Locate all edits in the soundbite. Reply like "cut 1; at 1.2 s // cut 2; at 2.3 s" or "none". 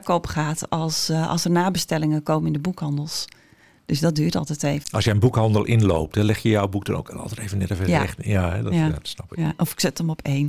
cut 1; at 4.8 s